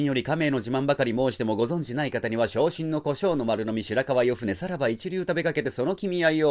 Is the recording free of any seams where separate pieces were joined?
yes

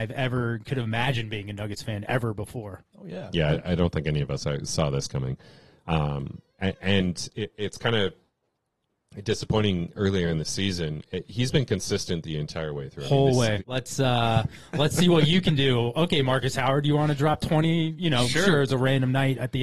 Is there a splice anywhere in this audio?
yes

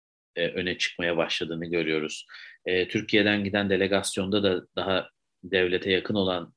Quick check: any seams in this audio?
no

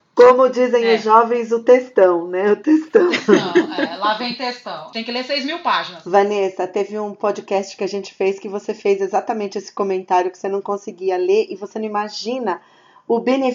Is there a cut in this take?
yes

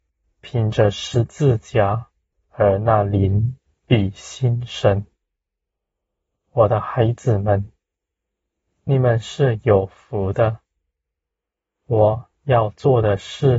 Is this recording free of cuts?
no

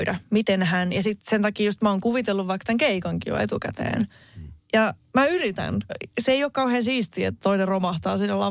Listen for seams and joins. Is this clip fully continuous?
no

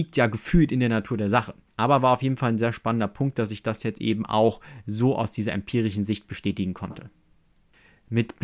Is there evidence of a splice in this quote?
no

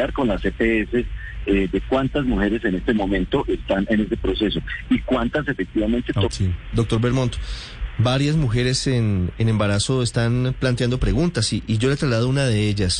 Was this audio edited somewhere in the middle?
yes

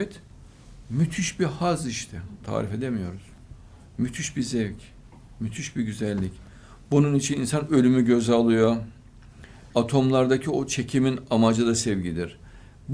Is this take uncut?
no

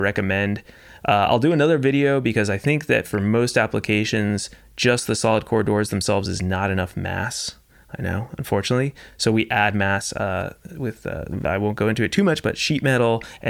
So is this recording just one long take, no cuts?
yes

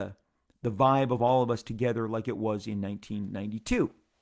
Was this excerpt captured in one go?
yes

